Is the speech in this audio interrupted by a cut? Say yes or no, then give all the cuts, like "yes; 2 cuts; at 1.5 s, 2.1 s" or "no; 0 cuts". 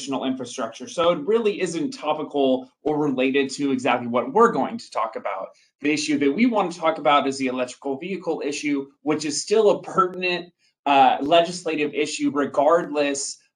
no; 0 cuts